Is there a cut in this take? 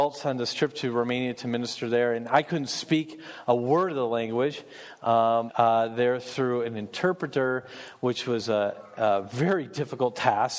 yes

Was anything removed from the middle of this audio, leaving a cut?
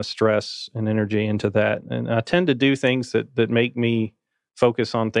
yes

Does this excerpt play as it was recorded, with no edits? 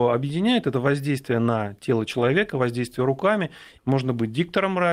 no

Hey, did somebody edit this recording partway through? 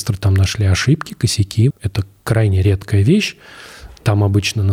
yes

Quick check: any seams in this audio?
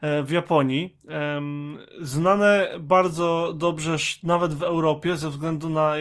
no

